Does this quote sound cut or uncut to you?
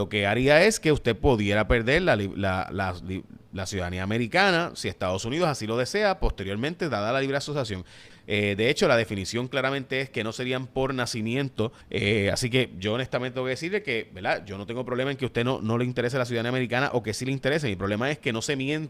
cut